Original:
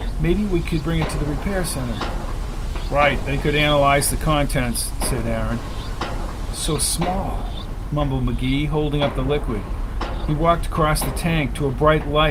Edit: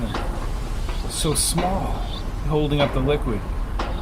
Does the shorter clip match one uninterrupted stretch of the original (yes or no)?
no